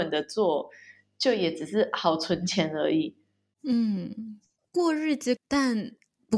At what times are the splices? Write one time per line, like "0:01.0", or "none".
0:05.4